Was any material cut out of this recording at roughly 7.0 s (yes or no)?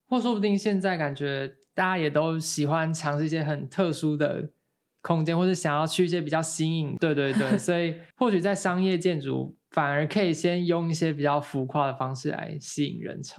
yes